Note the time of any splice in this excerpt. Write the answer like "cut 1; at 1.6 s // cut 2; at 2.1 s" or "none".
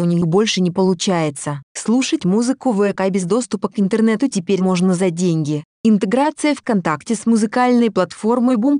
cut 1; at 1.6 s